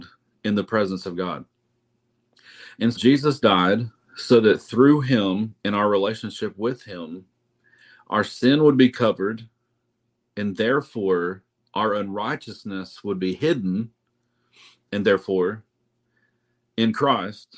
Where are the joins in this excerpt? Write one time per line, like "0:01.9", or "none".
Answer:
0:03.0